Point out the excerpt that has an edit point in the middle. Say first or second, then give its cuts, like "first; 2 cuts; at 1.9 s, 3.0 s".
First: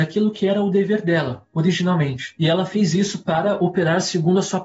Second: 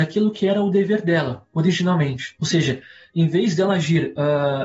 second; 1 cut; at 2.4 s